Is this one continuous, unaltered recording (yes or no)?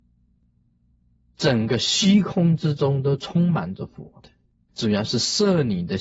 no